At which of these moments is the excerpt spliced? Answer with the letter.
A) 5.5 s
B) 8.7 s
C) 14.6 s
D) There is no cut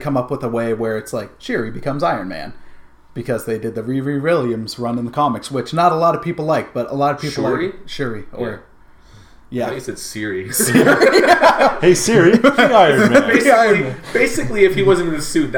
D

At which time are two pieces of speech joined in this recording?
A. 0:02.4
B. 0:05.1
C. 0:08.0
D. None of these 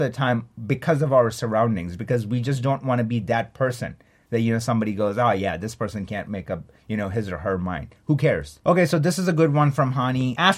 D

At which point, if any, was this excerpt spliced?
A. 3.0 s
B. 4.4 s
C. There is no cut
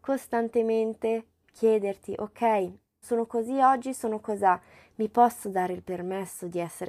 A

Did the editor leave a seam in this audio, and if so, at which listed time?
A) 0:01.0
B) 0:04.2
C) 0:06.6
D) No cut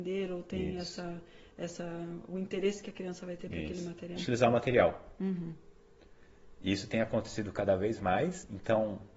B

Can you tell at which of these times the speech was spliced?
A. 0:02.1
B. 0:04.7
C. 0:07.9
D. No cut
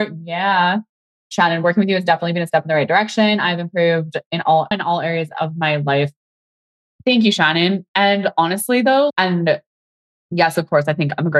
B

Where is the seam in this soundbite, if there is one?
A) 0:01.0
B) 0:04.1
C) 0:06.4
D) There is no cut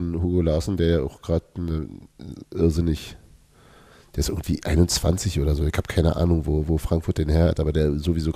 D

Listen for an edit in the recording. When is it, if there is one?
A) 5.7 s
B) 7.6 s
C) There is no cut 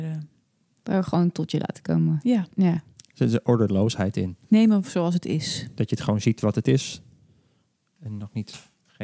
C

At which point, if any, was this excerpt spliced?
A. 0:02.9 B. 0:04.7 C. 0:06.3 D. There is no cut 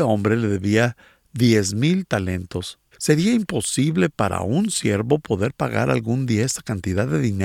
A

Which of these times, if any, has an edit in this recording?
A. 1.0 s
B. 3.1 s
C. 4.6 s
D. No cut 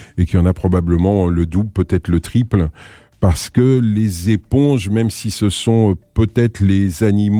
D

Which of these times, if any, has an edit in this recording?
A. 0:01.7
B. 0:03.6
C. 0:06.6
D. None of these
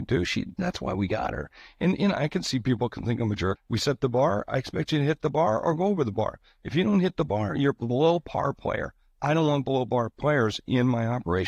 B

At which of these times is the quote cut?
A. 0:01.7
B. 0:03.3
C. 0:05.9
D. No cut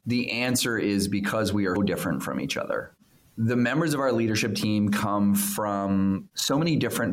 A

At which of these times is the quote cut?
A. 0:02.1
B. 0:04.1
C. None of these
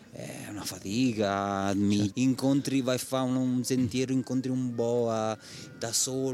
A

